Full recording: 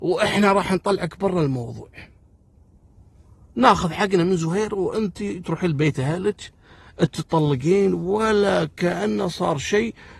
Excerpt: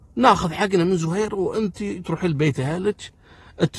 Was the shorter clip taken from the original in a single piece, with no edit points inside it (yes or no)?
yes